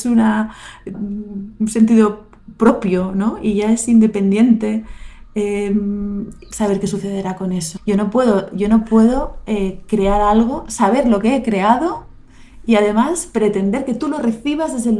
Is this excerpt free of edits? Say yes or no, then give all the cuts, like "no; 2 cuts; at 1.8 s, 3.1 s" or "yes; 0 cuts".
no; 3 cuts; at 0.9 s, 6.5 s, 7.8 s